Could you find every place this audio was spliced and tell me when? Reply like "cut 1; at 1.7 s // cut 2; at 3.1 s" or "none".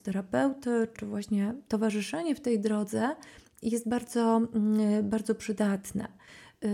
cut 1; at 0.9 s